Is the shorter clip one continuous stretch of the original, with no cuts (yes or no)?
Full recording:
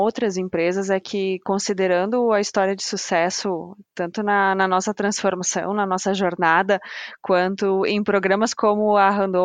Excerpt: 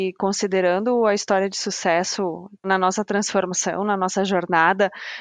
no